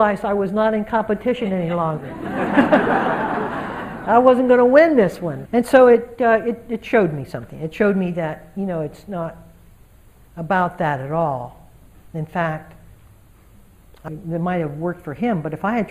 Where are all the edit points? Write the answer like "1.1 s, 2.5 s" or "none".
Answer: 5.5 s, 14.1 s